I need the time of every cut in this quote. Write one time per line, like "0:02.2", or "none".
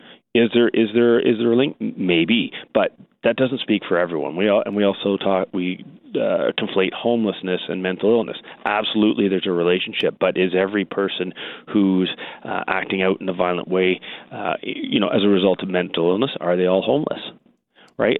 none